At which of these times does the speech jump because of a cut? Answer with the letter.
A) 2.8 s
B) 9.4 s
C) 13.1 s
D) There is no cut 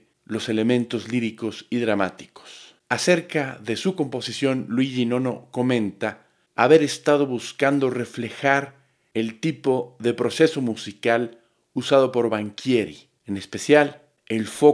A